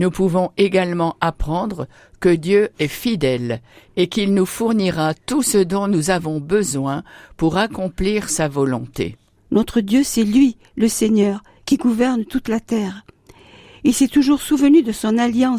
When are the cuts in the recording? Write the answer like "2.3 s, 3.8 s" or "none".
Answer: 9.4 s